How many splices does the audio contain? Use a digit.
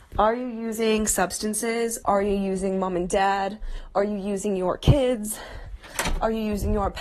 1